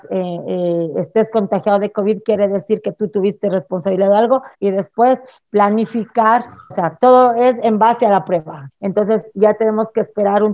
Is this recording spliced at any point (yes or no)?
yes